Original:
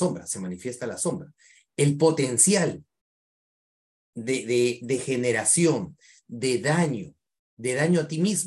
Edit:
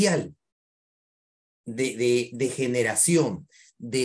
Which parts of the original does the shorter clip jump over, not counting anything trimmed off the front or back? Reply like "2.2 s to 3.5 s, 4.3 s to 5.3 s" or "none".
none